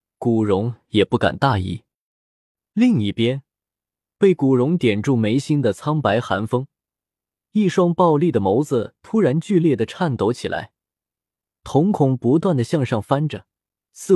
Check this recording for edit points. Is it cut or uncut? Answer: uncut